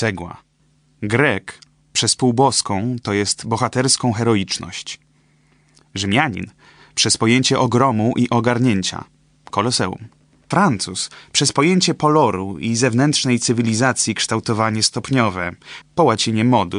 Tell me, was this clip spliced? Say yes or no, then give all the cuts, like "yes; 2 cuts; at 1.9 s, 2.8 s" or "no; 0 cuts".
yes; 2 cuts; at 10.5 s, 15.8 s